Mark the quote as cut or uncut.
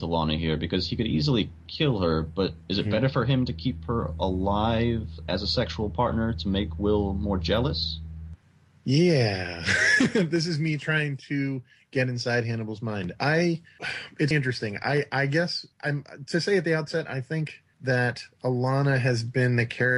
cut